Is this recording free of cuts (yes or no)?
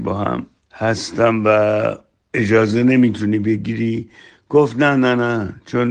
yes